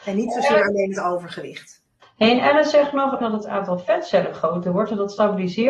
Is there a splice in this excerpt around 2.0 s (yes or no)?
yes